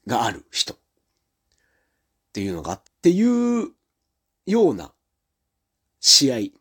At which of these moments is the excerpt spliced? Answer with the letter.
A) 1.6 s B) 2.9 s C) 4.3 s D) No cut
B